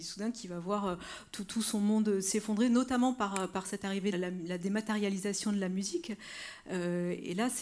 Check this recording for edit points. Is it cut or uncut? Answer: cut